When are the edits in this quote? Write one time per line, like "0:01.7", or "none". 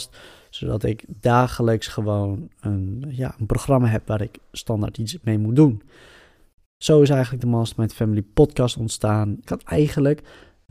0:09.5